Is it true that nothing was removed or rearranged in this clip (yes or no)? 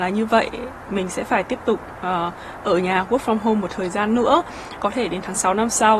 no